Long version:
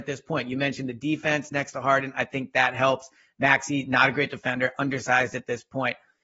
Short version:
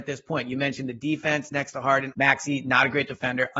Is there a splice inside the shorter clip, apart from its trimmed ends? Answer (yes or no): yes